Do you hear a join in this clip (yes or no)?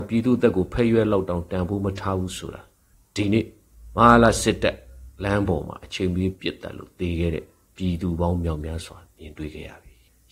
no